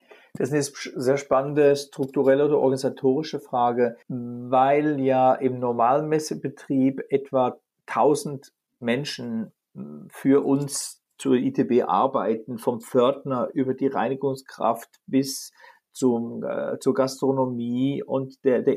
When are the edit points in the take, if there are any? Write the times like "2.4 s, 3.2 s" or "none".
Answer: 4.0 s